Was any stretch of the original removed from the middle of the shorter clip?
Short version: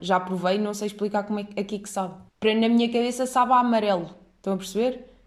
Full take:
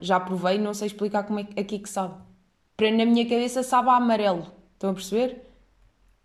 yes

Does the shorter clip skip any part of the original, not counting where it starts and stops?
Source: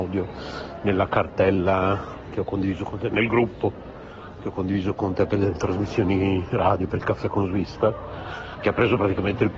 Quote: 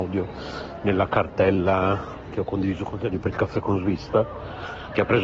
yes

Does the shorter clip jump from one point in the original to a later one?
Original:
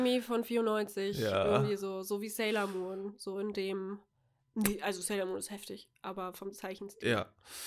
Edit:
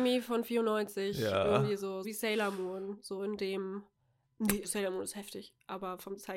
yes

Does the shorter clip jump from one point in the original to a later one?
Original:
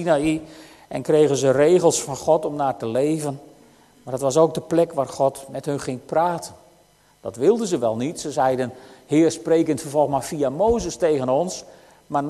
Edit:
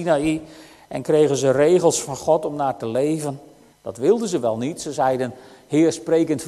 yes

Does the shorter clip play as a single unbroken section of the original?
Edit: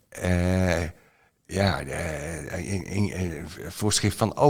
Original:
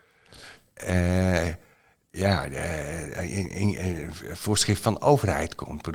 yes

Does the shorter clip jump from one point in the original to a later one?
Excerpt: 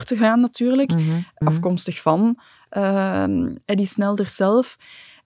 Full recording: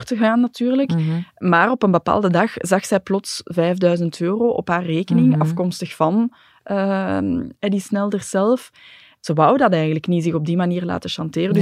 yes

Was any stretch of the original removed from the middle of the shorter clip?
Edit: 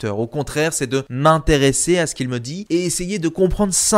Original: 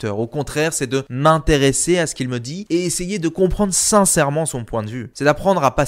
no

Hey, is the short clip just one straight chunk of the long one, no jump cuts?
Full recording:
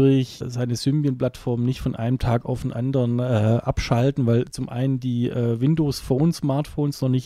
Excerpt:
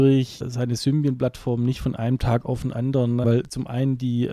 no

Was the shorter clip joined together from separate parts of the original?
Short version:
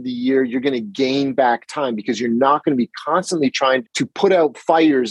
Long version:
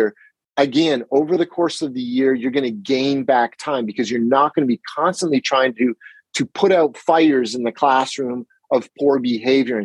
yes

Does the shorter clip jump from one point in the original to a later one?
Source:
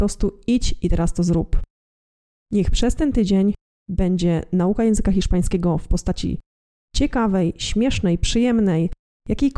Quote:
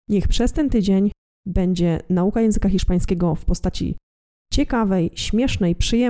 no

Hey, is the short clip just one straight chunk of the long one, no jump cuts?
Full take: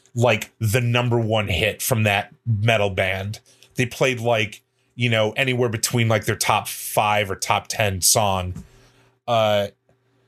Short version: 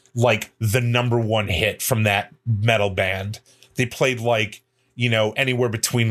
yes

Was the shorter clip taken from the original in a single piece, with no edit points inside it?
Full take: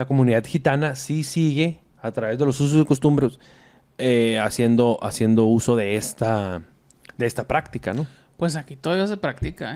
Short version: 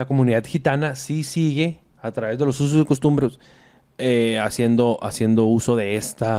yes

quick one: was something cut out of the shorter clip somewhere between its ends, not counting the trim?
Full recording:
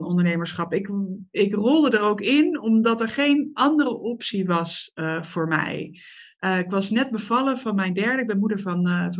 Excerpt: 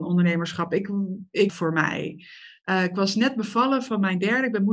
yes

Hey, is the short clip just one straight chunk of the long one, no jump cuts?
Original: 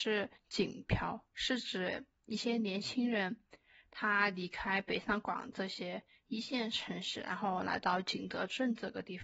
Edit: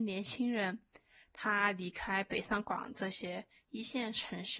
yes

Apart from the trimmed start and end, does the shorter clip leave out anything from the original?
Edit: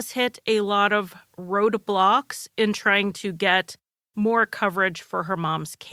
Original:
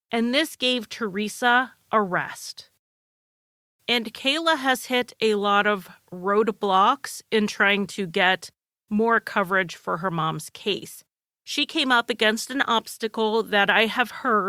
no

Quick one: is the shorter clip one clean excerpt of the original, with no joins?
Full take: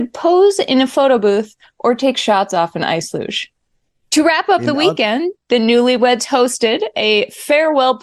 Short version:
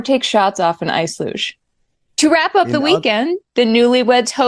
yes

